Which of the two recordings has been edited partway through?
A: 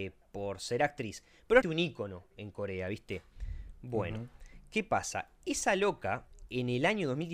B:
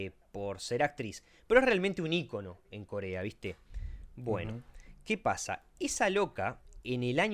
A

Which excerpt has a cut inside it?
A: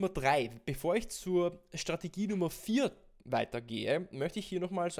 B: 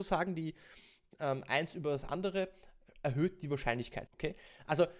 B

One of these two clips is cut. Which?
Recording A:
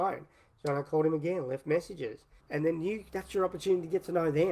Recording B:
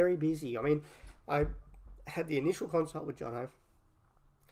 A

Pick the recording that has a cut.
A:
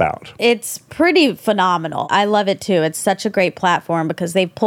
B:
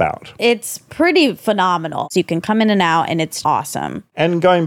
B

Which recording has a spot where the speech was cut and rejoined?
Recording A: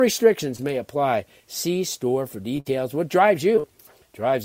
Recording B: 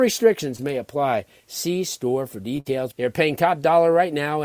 B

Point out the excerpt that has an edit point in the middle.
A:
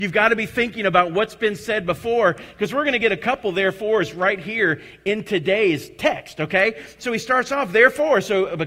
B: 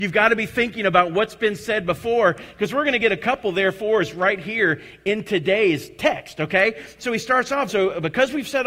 B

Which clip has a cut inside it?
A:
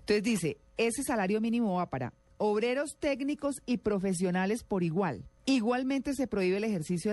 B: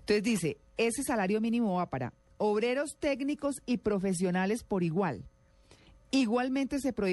A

